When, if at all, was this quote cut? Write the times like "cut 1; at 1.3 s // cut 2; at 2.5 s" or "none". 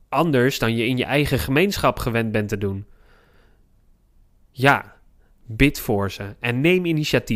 none